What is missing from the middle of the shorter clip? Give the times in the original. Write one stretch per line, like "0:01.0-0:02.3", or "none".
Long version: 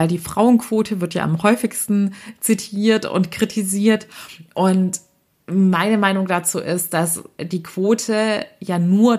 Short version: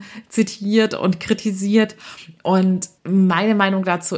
0:05.1-0:05.4